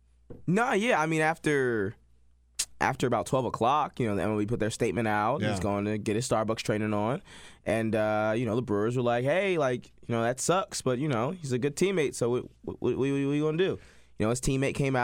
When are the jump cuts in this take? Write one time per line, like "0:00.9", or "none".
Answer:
none

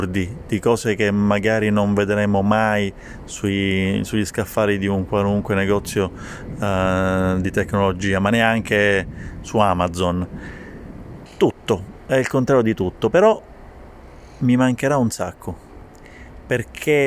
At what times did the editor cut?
0:11.3

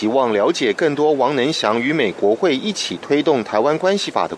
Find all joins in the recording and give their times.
0:02.1

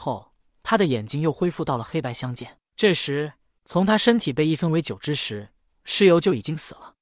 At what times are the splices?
0:03.6

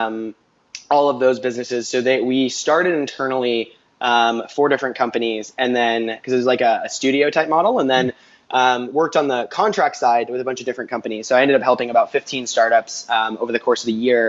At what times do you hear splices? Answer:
none

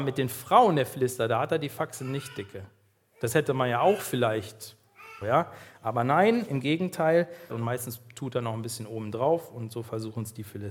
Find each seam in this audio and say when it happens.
0:05.2
0:07.5

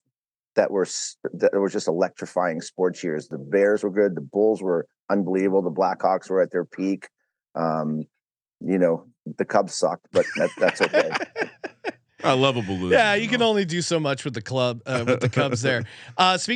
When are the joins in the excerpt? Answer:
0:09.7

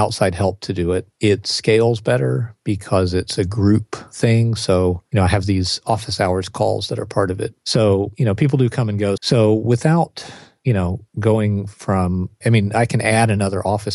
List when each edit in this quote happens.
0:07.6
0:09.2

